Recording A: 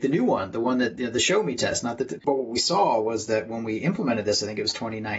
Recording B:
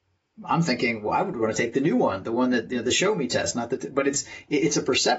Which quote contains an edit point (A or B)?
A